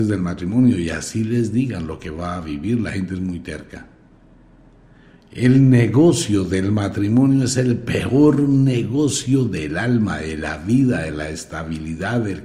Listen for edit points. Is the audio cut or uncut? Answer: uncut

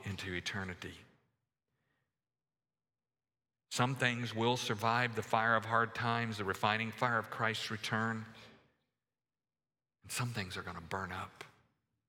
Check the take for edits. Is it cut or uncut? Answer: uncut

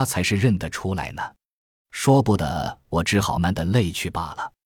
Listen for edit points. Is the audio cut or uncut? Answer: cut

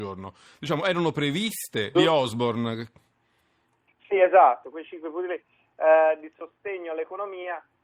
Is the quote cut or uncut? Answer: cut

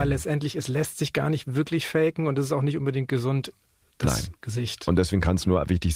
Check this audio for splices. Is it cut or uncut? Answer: uncut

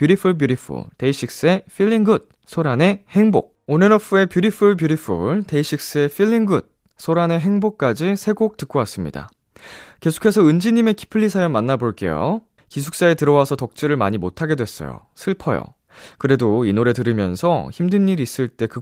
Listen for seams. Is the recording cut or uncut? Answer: cut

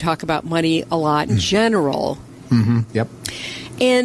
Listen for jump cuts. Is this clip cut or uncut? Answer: cut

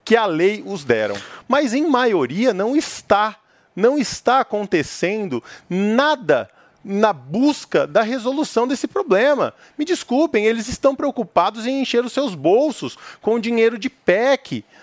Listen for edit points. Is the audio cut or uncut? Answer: cut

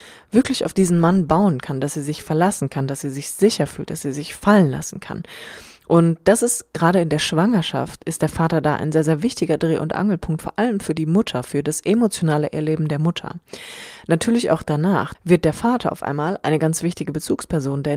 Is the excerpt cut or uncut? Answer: cut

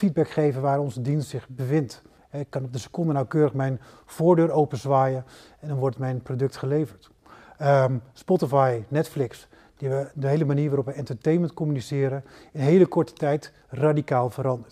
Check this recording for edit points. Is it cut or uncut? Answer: uncut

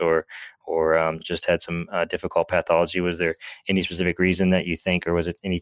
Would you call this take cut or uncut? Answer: uncut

